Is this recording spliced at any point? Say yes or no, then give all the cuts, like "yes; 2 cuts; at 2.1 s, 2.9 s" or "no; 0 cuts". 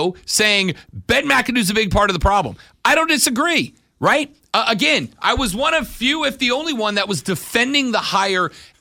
no; 0 cuts